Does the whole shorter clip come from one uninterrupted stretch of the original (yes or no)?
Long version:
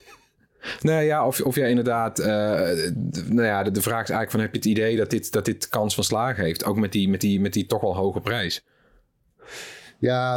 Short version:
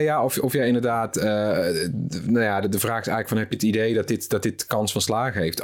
yes